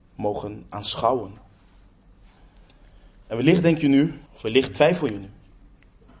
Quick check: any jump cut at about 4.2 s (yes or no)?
yes